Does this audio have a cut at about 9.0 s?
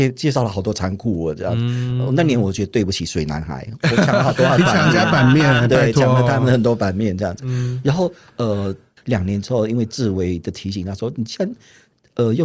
yes; 1 cut; at 9.0 s

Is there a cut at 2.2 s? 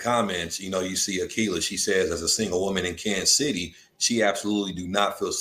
no; 0 cuts

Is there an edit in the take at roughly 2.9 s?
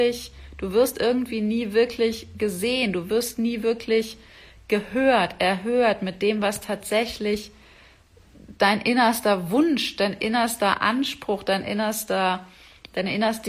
no; 0 cuts

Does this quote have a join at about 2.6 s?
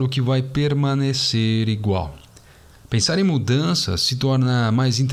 no; 0 cuts

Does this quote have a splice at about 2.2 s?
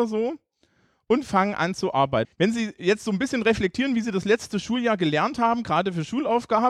yes; 1 cut; at 2.2 s

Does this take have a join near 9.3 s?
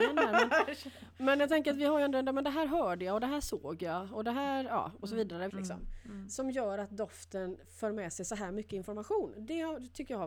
no; 1 cut; at 5.5 s

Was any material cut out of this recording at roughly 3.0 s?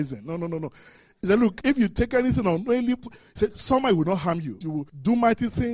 yes; 2 cuts; at 3.0 s, 4.6 s

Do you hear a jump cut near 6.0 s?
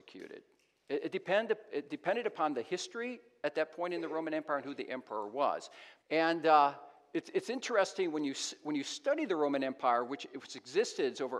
yes; 1 cut; at 6.0 s

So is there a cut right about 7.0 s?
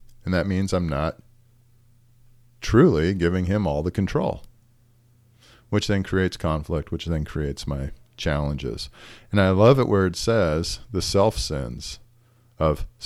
no; 0 cuts

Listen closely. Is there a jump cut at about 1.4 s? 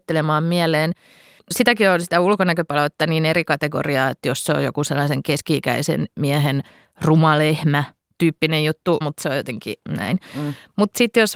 yes; 2 cuts; at 1.4 s, 9.0 s

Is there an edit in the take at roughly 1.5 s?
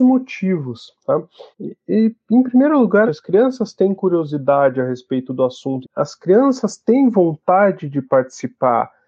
yes; 3 cuts; at 1.5 s, 3.1 s, 5.8 s

